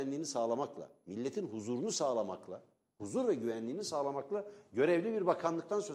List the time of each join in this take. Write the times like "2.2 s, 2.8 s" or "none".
none